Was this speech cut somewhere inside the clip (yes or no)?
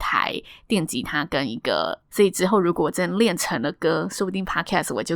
yes